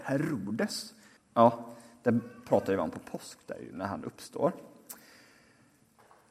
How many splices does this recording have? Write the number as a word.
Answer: one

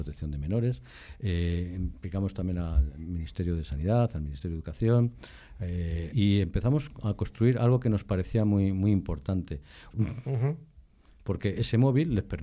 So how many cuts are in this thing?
two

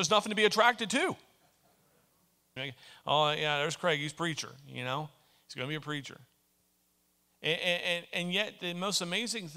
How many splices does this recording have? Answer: one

